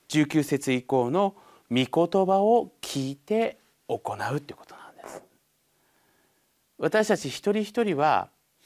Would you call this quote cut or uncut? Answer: uncut